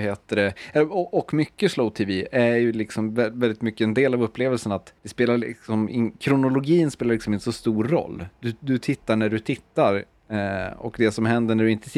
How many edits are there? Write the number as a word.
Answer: one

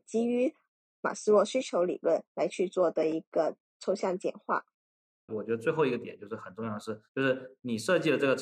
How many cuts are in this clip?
two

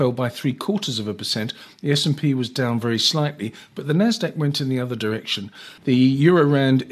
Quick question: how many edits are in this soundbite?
one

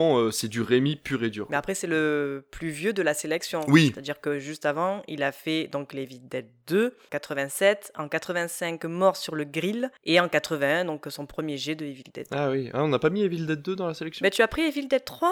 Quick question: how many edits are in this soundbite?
zero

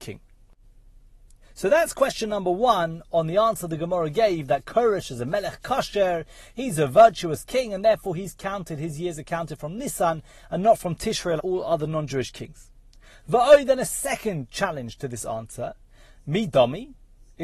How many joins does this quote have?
one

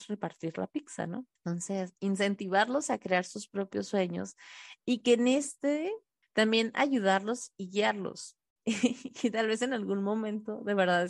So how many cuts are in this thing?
three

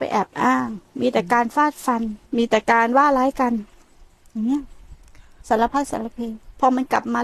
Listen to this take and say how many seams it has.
one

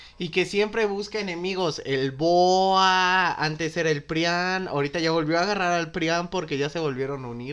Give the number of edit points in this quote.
zero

